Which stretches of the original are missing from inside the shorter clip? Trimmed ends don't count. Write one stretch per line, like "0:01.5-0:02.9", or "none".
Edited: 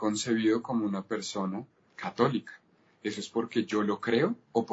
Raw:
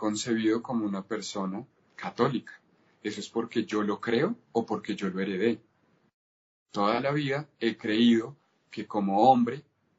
none